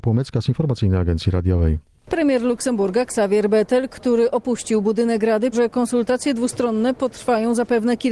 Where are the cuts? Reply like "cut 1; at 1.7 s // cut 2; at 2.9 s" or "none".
cut 1; at 5.5 s